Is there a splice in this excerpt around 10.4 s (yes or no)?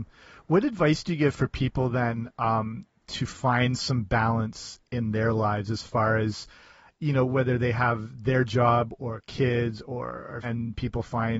yes